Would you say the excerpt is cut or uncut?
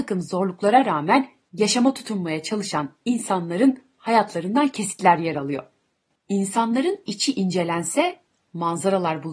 cut